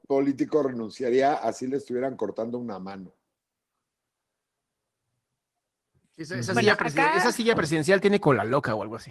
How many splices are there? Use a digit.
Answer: 0